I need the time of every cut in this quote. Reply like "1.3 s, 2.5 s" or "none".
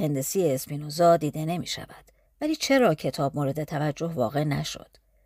2.2 s